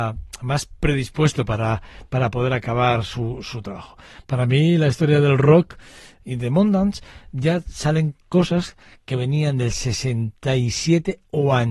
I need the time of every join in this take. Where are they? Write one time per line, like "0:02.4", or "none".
0:04.2
0:06.2